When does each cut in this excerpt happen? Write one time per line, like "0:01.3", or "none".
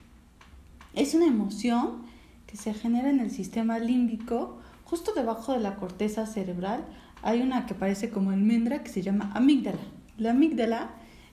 0:10.1